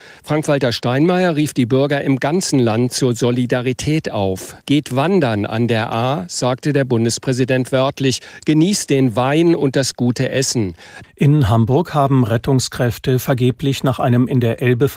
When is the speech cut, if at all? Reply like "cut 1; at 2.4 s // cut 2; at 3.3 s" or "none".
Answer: cut 1; at 4.6 s // cut 2; at 11.0 s